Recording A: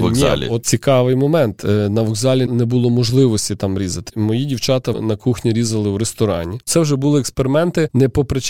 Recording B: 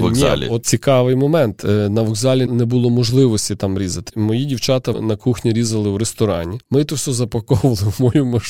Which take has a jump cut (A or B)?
A